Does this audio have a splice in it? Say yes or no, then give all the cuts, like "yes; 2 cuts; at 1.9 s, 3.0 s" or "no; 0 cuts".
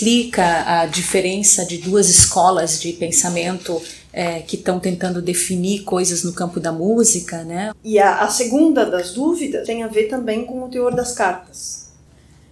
yes; 2 cuts; at 7.7 s, 9.6 s